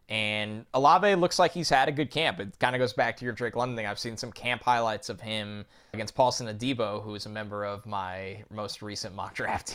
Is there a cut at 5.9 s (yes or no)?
yes